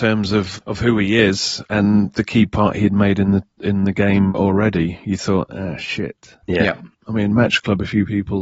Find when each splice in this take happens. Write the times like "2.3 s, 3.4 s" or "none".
none